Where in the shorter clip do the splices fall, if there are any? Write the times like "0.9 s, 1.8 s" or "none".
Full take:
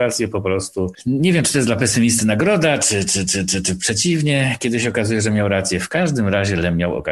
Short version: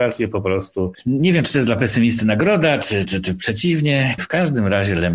3.0 s, 4.2 s